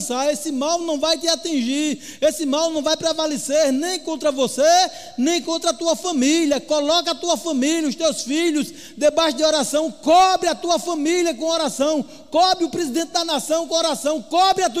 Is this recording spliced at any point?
no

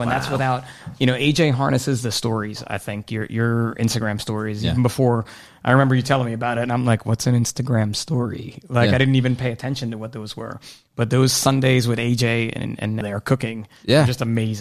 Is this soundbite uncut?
no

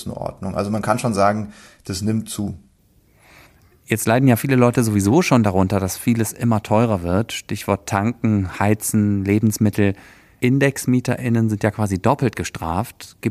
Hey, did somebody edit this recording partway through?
no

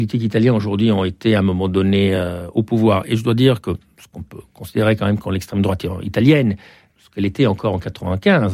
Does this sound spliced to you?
no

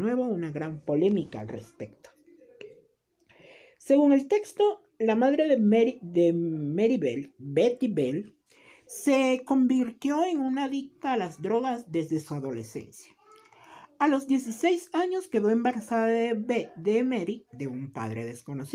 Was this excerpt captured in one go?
yes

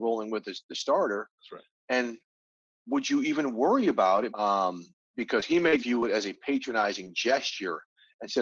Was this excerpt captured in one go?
no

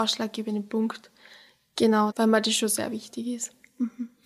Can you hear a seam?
yes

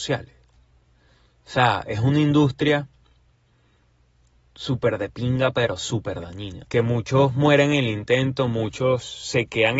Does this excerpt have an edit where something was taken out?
yes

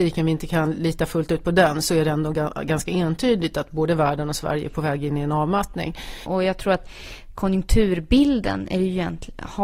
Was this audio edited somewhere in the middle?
yes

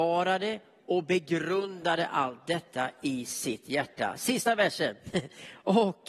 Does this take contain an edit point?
no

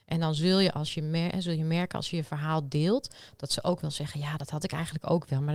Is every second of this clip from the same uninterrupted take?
yes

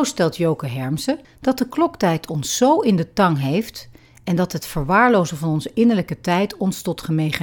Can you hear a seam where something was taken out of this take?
yes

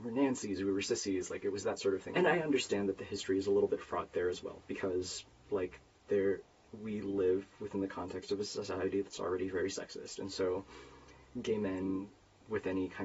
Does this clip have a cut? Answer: yes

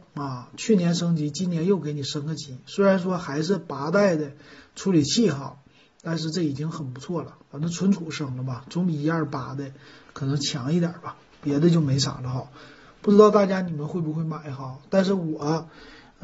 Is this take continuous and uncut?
yes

